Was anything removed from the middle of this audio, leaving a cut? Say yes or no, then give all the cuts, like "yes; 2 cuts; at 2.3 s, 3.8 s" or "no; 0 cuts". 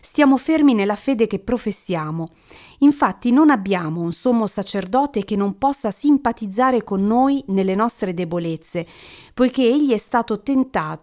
no; 0 cuts